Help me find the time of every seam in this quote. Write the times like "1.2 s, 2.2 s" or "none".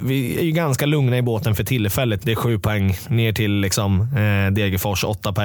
2.2 s